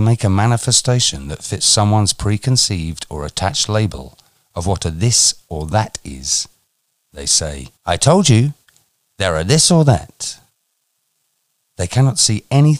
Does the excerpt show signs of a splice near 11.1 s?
no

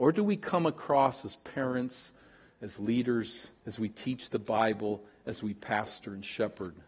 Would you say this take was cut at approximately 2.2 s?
no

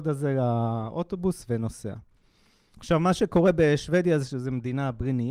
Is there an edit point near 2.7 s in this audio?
yes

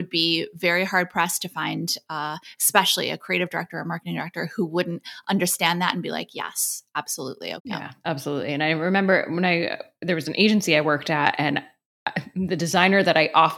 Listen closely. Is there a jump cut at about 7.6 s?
yes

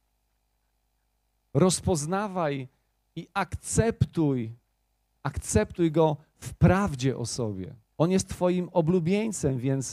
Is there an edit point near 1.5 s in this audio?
no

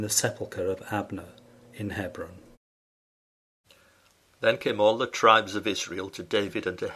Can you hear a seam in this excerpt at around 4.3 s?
no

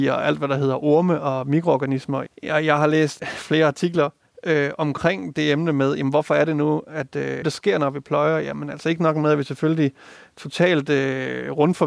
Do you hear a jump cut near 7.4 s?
yes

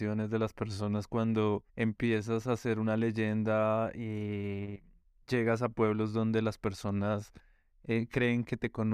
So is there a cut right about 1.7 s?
yes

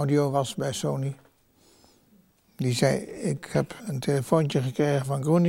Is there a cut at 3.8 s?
yes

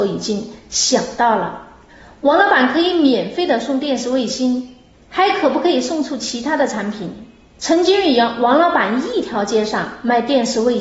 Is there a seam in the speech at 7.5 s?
yes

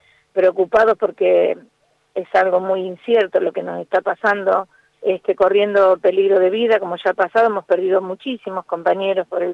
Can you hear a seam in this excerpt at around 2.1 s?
no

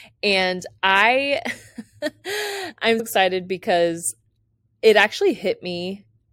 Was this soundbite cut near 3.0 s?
yes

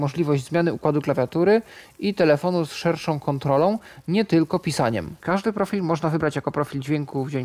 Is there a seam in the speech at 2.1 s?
no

